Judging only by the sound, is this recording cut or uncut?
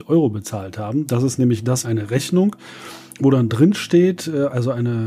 cut